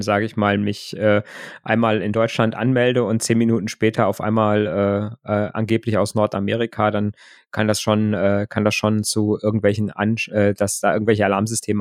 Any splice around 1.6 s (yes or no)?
no